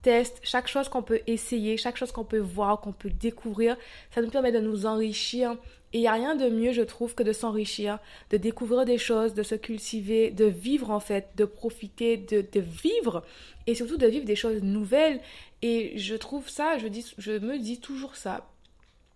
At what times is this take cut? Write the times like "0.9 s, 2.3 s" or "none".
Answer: none